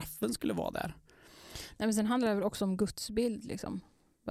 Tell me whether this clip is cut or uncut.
uncut